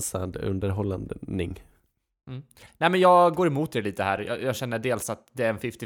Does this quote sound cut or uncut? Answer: uncut